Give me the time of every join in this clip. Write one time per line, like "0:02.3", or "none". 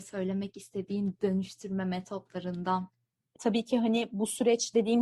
0:03.4

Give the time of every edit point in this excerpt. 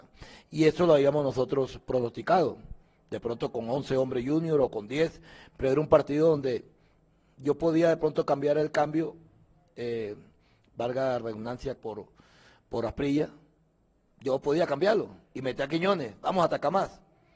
0:11.8
0:15.2

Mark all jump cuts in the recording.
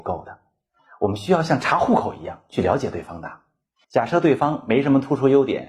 0:03.8

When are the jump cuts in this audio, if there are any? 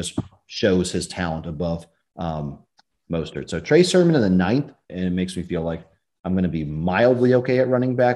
0:04.9

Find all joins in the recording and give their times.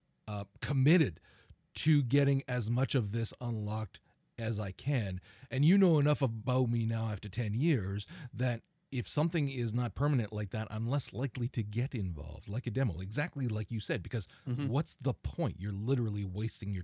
none

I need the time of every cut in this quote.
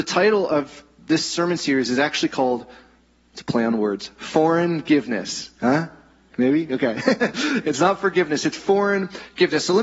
none

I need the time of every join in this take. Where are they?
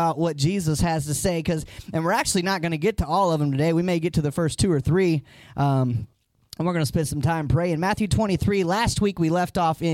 none

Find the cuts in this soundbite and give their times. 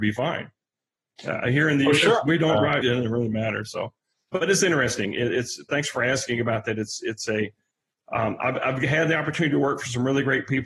0:02.8
0:04.3

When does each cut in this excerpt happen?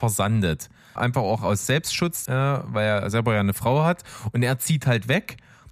0:01.0
0:02.3

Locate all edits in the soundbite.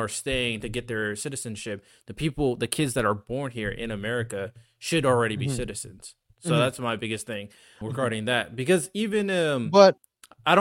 0:07.8

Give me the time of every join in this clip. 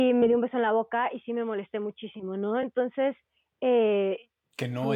none

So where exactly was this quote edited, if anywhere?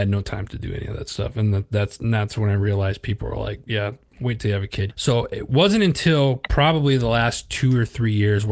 0:04.9

